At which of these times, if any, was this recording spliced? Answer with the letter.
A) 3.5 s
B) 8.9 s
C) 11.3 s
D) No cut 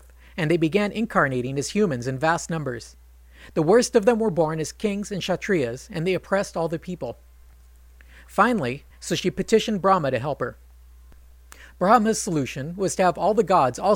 B